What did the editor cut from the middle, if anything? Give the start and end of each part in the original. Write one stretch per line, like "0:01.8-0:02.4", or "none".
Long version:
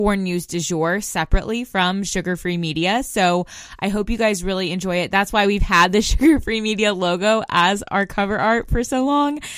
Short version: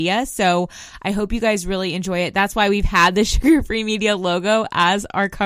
none